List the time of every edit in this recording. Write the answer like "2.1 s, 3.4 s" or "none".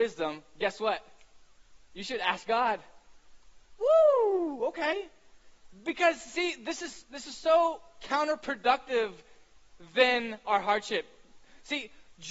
none